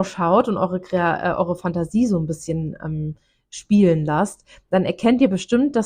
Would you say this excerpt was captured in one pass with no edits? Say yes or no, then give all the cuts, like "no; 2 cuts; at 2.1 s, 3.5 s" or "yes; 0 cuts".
yes; 0 cuts